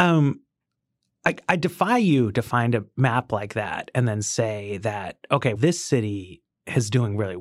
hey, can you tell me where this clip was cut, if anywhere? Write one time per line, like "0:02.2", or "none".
0:05.6